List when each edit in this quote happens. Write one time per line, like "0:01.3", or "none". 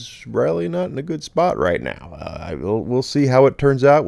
none